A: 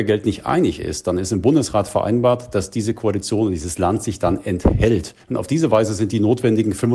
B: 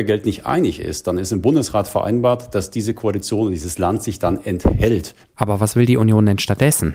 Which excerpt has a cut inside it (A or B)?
B